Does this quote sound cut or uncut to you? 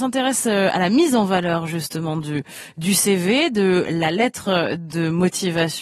uncut